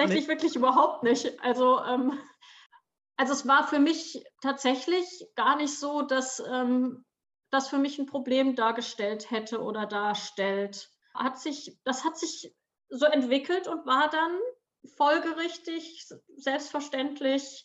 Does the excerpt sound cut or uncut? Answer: cut